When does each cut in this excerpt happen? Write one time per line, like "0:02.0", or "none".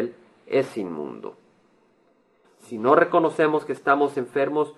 0:02.4